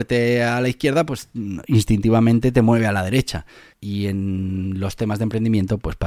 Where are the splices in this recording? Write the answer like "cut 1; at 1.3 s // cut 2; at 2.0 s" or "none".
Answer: cut 1; at 3.7 s

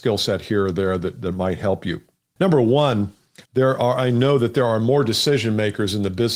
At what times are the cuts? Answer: cut 1; at 3.4 s

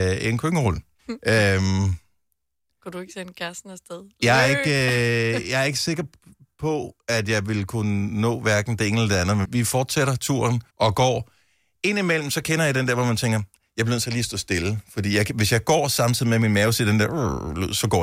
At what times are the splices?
cut 1; at 1.0 s // cut 2; at 9.4 s // cut 3; at 10.7 s

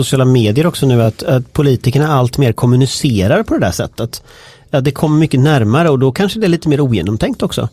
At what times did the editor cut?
none

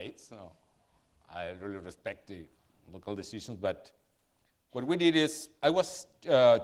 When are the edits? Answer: none

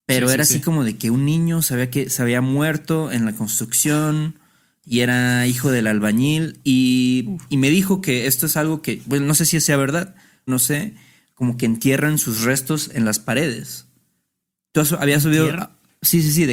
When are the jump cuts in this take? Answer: cut 1; at 10.5 s

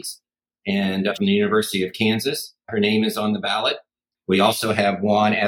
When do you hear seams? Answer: cut 1; at 1.1 s

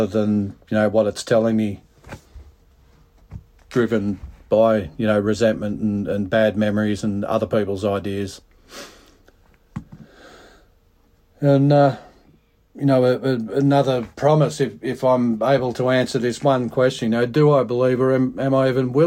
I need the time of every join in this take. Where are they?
none

